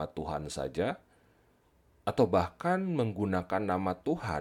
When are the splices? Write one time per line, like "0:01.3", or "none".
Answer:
none